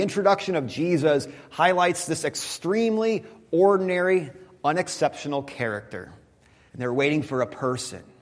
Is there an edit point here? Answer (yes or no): yes